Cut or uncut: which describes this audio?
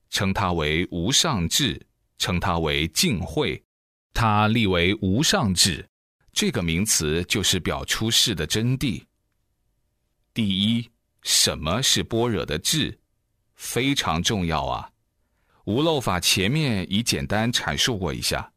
cut